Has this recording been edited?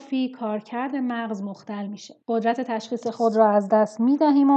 yes; 1 cut; at 2.2 s

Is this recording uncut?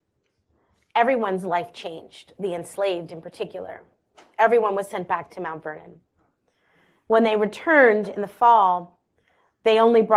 yes; 0 cuts

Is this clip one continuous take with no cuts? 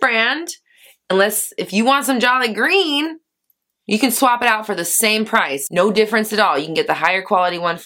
yes; 0 cuts

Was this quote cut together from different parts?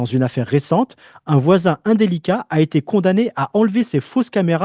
no; 0 cuts

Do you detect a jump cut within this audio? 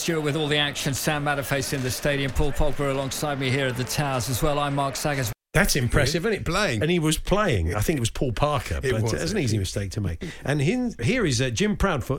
yes; 2 cuts; at 6.5 s, 11.0 s

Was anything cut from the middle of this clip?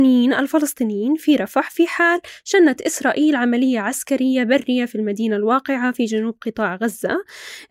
no; 0 cuts

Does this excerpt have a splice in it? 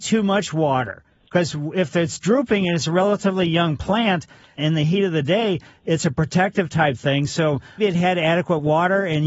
yes; 2 cuts; at 4.6 s, 7.8 s

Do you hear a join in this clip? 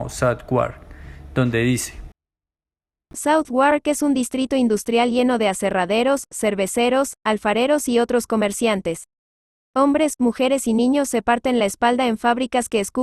yes; 1 cut; at 6.3 s

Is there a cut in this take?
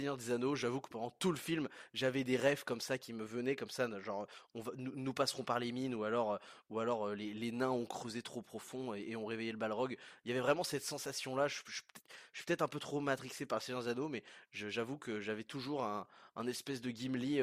no; 0 cuts

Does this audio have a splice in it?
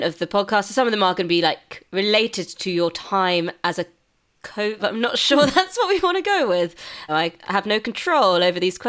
yes; 2 cuts; at 4.8 s, 7.1 s

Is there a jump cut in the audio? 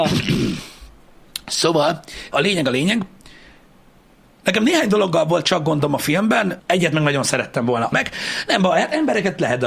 yes; 3 cuts; at 2.3 s, 6.6 s, 7.9 s

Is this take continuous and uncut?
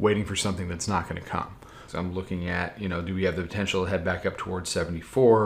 no; 1 cut; at 1.9 s

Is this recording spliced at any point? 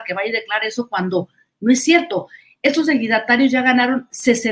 no; 0 cuts

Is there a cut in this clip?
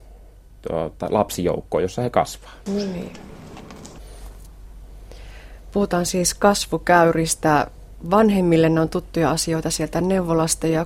yes; 1 cut; at 2.7 s

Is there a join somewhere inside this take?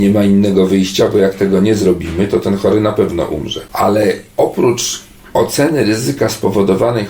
yes; 1 cut; at 4.3 s

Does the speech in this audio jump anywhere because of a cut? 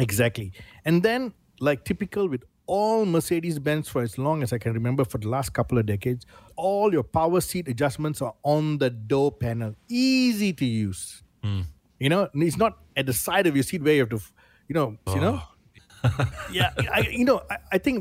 yes; 2 cuts; at 15.1 s, 16.3 s

